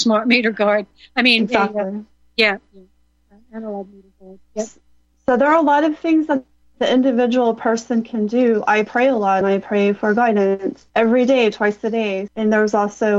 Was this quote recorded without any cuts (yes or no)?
no